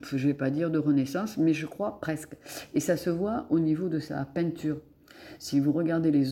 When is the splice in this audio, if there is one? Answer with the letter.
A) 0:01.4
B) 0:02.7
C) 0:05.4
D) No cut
D